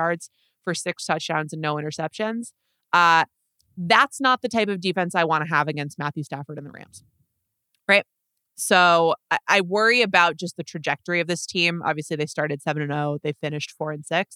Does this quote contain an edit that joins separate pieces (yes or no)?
no